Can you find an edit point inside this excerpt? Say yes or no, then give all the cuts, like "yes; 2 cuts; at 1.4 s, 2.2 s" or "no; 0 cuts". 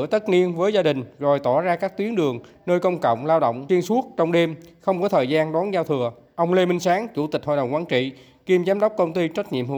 no; 0 cuts